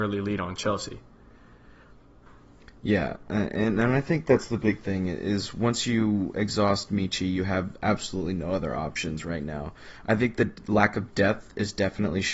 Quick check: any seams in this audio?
no; 0 cuts

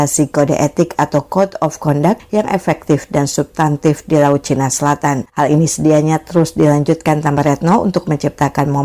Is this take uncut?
no; 1 cut; at 5.3 s

